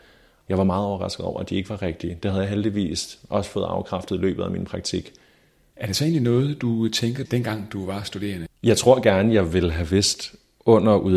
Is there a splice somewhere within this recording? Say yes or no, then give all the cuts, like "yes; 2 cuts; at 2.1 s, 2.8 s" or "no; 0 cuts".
yes; 2 cuts; at 7.3 s, 8.5 s